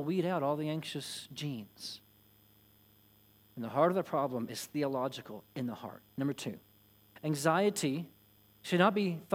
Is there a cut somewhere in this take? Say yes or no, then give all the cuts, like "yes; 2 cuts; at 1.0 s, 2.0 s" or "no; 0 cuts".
yes; 1 cut; at 3.4 s